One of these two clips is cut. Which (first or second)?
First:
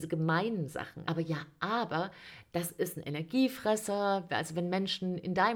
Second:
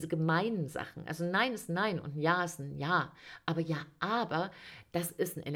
first